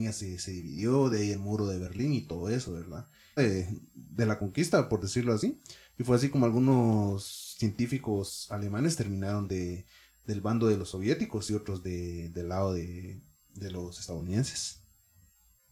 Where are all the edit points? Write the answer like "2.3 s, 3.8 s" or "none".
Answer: 3.4 s